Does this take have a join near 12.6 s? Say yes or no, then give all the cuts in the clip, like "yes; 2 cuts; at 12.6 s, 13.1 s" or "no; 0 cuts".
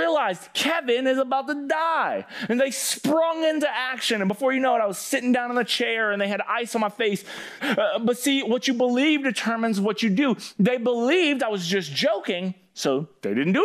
no; 1 cut; at 7.6 s